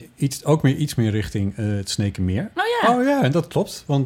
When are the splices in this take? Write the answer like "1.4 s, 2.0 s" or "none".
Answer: 2.5 s

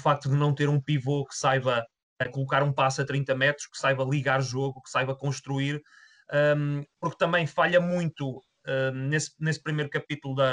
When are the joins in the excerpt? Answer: none

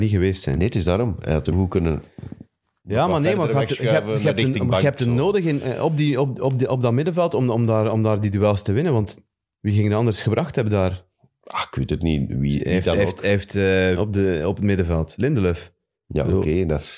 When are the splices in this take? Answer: 1.5 s, 14.0 s

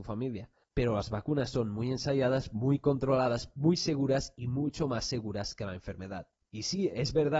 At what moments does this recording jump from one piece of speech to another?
none

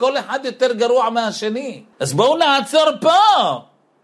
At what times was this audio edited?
1.9 s

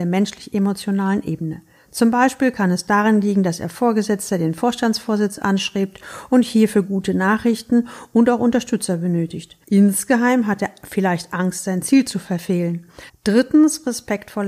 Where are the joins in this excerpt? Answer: 13.1 s

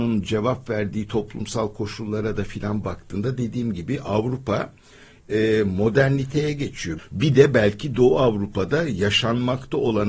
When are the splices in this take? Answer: 7.0 s

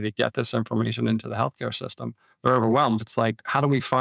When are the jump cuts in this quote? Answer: 3.0 s

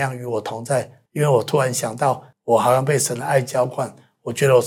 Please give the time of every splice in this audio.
1.1 s, 2.3 s

